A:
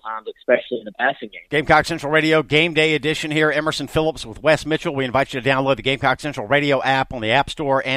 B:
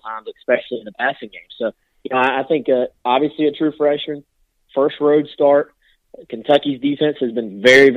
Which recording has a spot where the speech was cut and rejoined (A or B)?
A